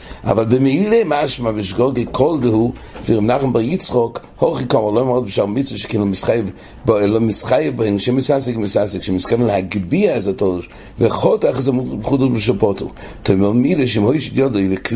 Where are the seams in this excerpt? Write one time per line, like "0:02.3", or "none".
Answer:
0:03.0